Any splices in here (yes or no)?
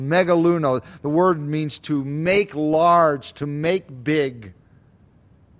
no